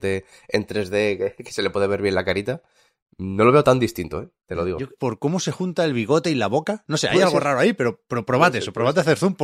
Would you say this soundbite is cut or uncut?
cut